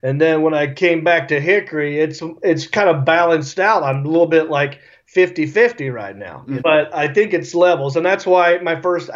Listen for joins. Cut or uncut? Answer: cut